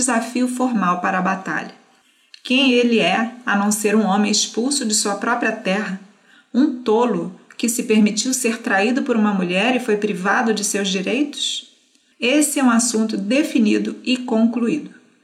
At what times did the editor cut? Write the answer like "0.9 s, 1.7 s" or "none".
12.1 s